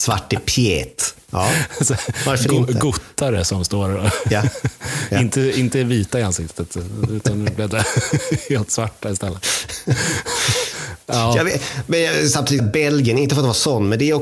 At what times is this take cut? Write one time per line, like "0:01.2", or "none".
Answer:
0:12.6